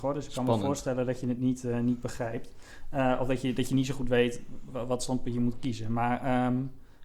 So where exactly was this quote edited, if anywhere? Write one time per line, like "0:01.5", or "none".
none